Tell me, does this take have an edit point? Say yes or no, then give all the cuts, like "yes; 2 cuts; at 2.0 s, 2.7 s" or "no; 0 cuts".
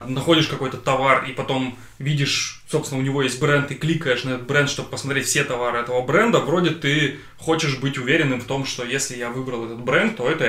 no; 0 cuts